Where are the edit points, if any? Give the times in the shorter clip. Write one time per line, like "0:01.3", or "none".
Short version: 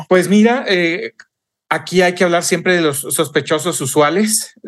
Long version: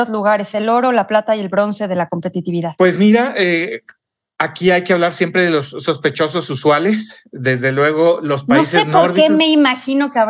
none